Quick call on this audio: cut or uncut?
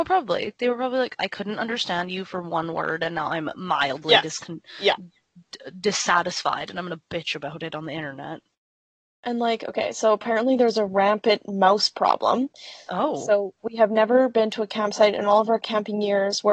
cut